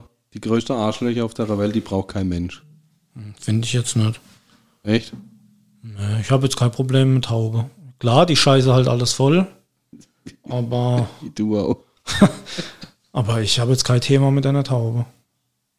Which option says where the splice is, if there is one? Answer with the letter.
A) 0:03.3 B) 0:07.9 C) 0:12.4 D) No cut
D